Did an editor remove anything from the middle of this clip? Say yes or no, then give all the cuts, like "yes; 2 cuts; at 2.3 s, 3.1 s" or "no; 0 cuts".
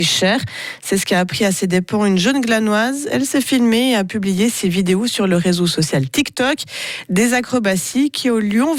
no; 0 cuts